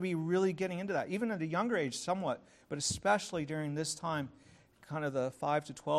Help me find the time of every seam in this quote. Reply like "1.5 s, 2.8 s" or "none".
none